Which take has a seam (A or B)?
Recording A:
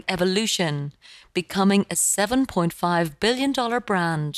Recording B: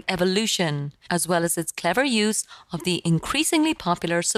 B